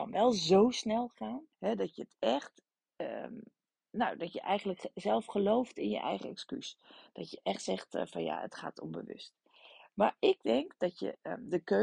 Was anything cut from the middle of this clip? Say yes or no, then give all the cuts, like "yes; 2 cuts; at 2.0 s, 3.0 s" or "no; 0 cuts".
yes; 1 cut; at 1.5 s